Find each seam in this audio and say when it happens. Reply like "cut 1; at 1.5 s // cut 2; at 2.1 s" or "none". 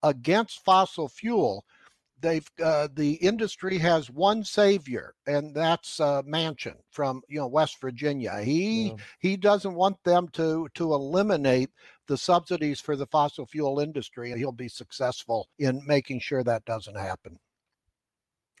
cut 1; at 14.3 s // cut 2; at 15.5 s